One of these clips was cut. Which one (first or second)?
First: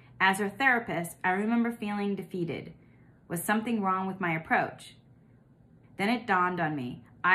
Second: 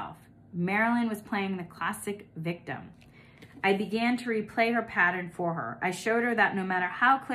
first